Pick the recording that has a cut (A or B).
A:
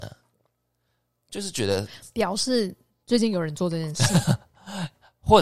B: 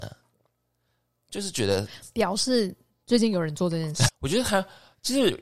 B